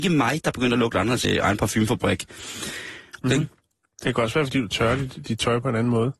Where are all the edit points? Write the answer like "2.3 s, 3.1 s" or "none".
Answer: 1.2 s, 3.2 s